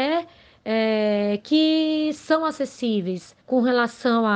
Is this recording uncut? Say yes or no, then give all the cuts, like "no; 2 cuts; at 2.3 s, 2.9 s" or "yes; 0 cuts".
no; 1 cut; at 3.4 s